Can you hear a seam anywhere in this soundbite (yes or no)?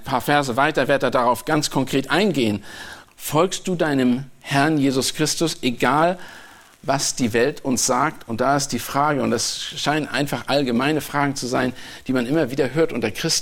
yes